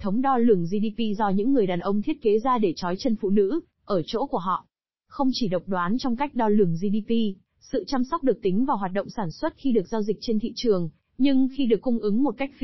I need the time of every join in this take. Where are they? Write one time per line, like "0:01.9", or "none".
none